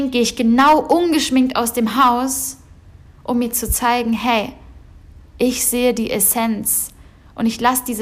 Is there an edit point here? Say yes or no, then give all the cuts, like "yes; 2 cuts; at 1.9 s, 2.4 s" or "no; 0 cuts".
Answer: no; 0 cuts